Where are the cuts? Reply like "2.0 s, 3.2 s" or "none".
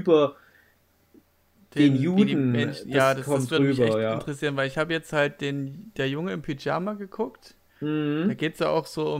none